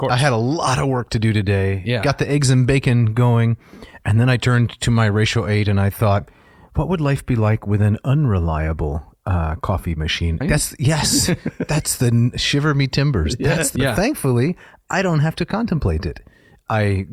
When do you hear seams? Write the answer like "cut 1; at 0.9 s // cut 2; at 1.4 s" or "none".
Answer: cut 1; at 10.4 s // cut 2; at 13.8 s